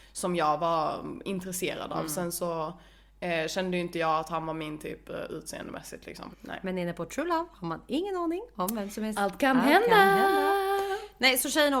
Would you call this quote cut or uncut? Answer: cut